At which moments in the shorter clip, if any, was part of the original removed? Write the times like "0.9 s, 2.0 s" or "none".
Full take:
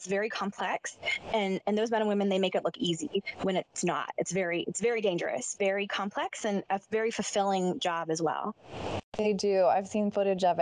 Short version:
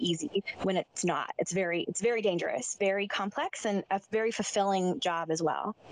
none